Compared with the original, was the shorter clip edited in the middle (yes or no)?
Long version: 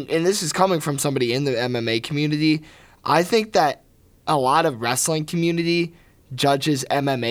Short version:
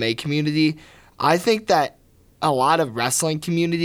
no